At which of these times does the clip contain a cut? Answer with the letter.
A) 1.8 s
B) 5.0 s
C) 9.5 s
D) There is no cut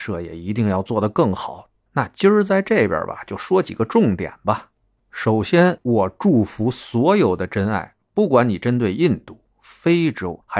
A